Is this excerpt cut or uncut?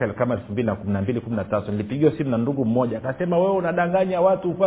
uncut